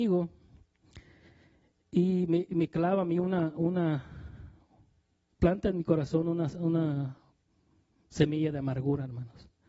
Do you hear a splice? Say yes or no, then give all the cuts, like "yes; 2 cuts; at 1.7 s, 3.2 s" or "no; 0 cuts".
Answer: no; 0 cuts